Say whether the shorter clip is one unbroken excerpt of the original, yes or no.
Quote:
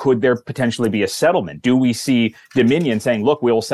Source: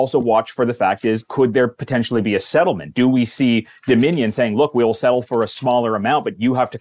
yes